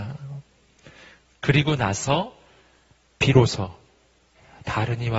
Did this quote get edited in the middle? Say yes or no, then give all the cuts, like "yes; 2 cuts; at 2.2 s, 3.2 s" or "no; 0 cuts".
no; 0 cuts